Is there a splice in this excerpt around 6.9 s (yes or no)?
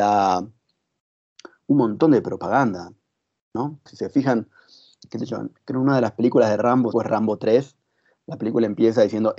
yes